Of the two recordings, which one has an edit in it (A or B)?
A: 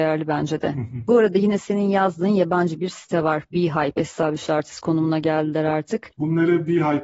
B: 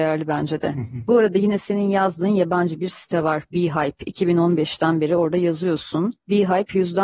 A